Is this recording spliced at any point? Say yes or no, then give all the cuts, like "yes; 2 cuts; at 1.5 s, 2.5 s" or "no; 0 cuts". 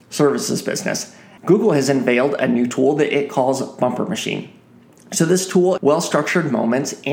yes; 2 cuts; at 1.4 s, 5.8 s